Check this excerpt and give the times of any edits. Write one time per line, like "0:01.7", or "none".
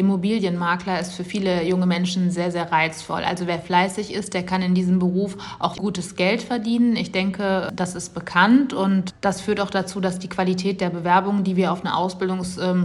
0:05.7